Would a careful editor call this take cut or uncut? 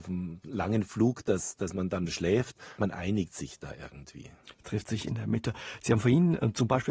cut